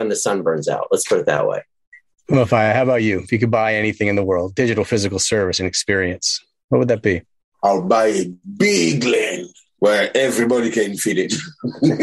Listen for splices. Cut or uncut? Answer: uncut